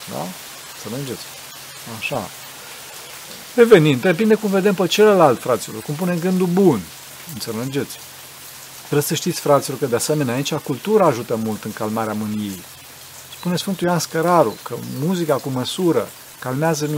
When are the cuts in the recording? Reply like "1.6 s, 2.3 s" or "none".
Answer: none